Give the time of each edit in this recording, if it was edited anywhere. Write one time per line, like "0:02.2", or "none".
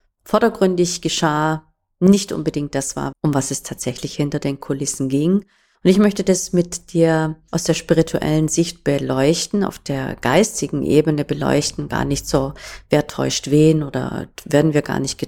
0:03.1
0:05.7